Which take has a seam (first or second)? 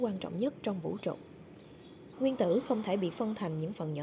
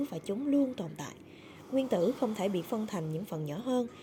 first